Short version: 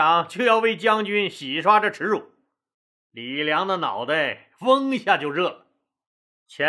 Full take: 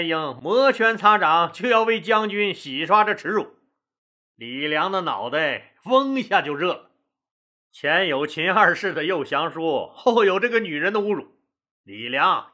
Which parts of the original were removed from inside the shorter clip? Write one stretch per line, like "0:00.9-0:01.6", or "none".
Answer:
none